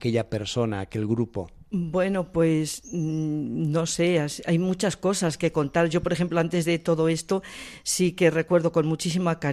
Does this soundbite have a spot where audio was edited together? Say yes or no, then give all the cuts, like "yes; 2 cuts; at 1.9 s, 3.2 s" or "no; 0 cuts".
no; 0 cuts